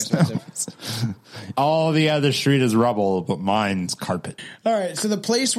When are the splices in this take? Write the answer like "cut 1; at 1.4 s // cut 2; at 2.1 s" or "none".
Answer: cut 1; at 1.5 s // cut 2; at 4.4 s